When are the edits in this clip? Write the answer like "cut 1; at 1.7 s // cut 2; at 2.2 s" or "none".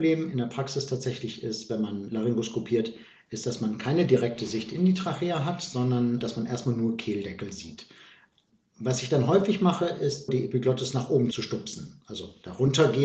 cut 1; at 10.3 s

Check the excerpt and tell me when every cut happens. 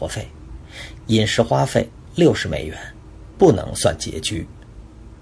cut 1; at 3.3 s

